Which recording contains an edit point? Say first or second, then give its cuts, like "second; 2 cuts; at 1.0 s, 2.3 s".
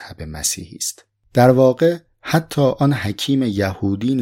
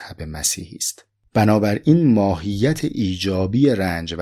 second; 1 cut; at 1.3 s